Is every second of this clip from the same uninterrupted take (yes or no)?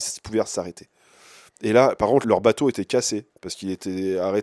no